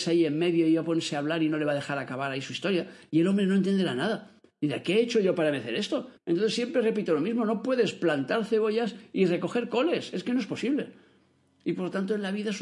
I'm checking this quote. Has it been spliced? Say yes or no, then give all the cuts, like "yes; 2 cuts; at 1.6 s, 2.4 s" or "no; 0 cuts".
yes; 1 cut; at 6.2 s